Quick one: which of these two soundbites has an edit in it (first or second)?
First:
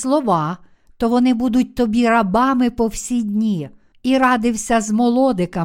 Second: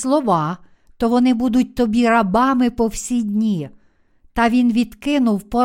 first